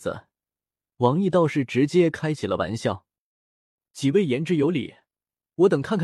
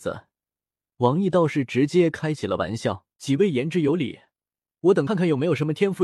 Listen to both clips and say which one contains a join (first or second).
second